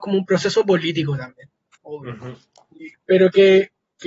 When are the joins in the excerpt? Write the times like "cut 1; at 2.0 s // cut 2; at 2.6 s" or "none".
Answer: cut 1; at 1.7 s // cut 2; at 2.9 s

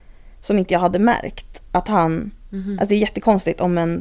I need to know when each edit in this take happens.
none

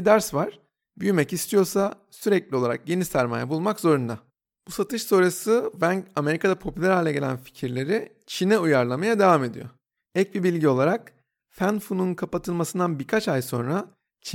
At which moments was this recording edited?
cut 1; at 10.1 s

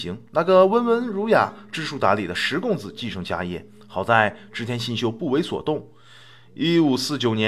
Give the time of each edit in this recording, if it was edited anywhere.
none

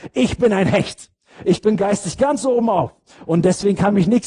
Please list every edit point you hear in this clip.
none

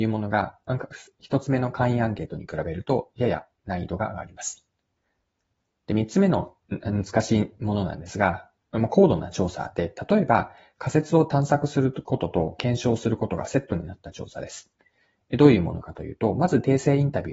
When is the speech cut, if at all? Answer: cut 1; at 6.6 s

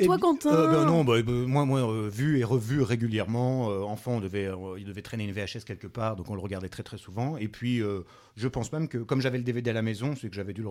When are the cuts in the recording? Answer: none

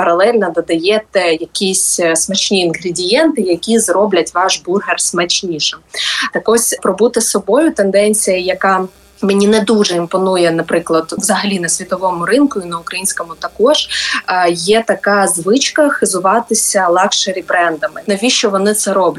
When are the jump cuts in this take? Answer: cut 1; at 11.2 s // cut 2; at 18.1 s

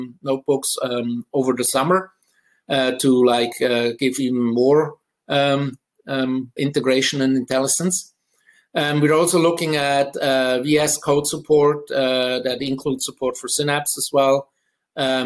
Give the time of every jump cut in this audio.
cut 1; at 6.6 s

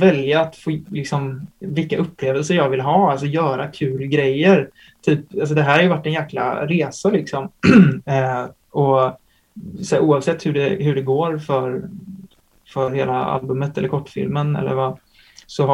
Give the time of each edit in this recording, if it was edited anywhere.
none

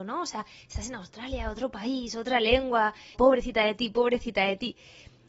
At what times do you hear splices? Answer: cut 1; at 3.1 s

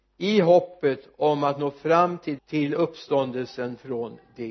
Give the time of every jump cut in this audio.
cut 1; at 2.4 s

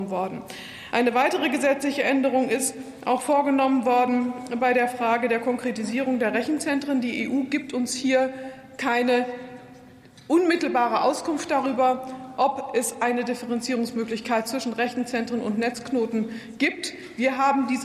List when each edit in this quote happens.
none

